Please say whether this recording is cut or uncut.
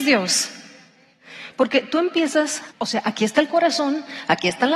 cut